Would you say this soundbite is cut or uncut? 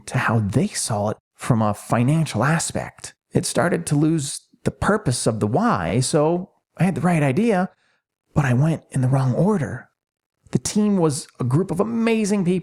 uncut